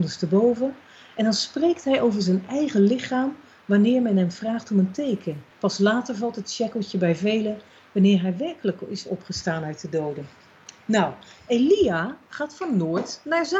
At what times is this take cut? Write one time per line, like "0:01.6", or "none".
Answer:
0:05.5